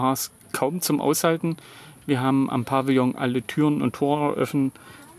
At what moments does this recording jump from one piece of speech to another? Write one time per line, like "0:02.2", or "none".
none